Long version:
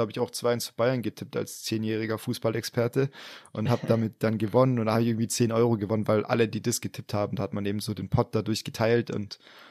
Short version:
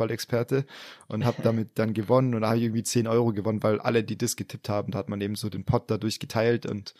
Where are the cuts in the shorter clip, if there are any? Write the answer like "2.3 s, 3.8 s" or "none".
none